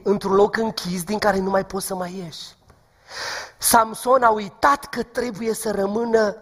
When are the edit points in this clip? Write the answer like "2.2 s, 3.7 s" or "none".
none